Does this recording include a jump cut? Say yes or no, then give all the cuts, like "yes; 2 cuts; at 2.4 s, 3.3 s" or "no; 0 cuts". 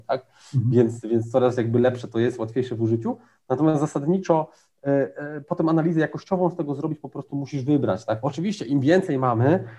yes; 1 cut; at 8.2 s